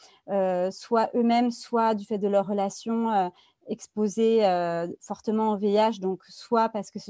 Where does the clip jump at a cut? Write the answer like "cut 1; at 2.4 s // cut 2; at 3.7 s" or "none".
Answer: none